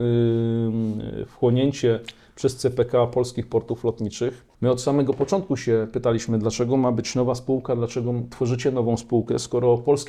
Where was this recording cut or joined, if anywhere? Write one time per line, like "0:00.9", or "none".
0:04.5